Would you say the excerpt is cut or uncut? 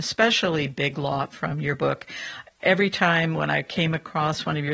uncut